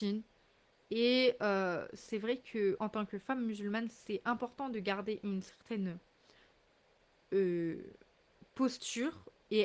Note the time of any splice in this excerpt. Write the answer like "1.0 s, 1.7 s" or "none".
2.8 s